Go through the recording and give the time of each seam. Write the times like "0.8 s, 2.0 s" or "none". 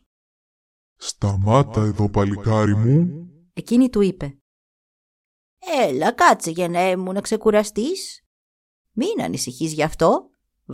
3.5 s, 8.8 s